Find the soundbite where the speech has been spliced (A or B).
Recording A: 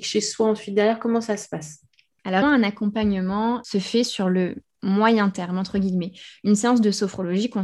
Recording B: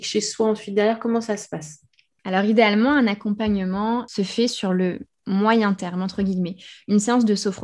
A